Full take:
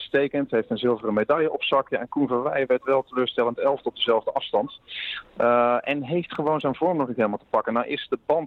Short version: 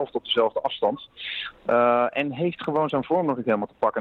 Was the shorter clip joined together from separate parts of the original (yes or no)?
no